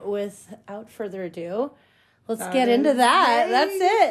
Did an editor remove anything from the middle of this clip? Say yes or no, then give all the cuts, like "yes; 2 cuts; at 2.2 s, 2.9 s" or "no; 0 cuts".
no; 0 cuts